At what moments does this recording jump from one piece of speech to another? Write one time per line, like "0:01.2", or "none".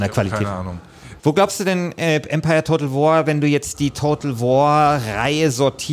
0:01.2